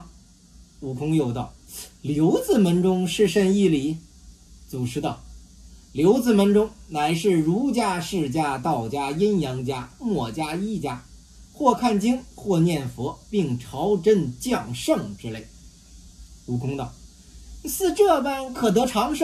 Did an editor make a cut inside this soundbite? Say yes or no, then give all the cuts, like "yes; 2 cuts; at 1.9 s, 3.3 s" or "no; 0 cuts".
no; 0 cuts